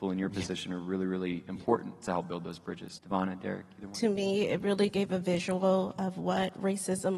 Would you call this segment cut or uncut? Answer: cut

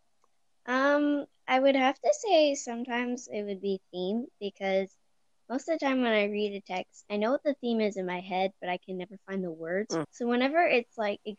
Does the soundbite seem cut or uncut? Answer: cut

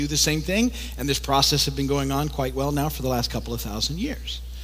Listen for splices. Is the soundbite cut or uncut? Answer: uncut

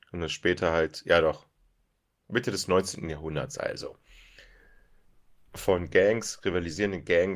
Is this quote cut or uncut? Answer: uncut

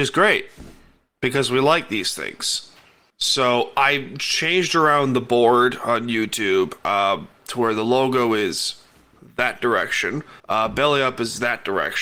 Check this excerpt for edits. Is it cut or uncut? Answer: cut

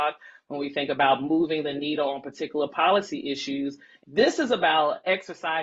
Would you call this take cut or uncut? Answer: cut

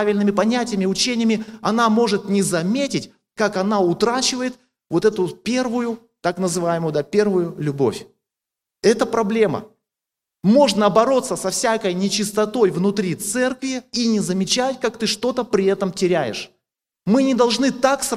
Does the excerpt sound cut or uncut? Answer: uncut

